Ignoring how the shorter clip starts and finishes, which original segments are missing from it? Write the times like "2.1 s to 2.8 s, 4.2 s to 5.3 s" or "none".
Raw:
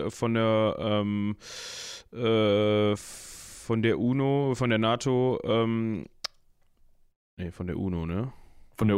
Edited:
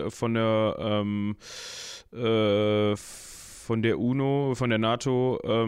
none